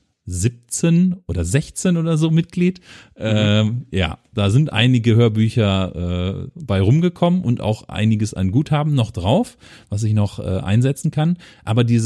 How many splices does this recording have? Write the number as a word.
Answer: zero